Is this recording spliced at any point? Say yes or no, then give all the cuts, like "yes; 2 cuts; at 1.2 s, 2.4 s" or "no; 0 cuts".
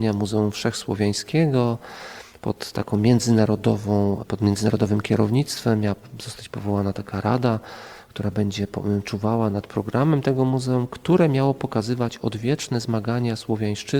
no; 0 cuts